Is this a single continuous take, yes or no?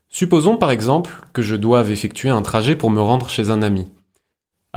yes